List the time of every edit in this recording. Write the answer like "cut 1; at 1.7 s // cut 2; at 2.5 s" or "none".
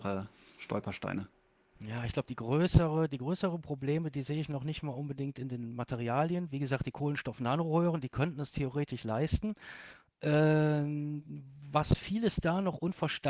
none